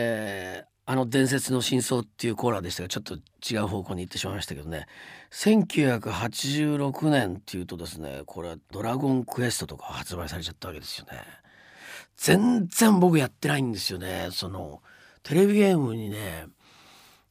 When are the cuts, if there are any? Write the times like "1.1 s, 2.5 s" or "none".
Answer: none